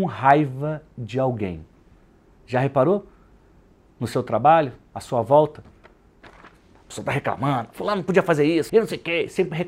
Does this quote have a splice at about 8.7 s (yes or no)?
yes